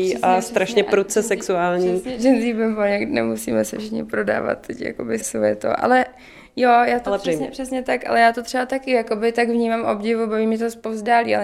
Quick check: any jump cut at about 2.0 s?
no; 2 cuts; at 5.2 s, 7.2 s

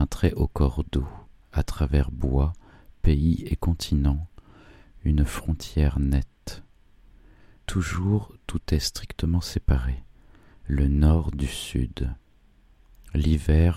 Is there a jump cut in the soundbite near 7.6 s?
yes; 2 cuts; at 7.6 s, 10.6 s

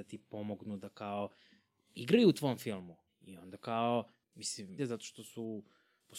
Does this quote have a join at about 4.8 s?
yes; 2 cuts; at 3.1 s, 4.8 s

